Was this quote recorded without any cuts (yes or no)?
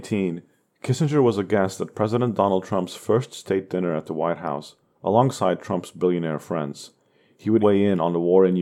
no